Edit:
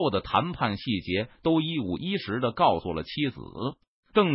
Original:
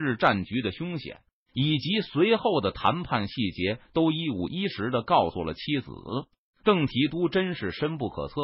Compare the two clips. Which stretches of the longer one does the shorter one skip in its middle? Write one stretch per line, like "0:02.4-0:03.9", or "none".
none